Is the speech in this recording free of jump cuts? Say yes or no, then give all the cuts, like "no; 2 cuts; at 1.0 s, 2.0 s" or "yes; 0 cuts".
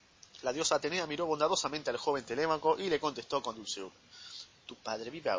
yes; 0 cuts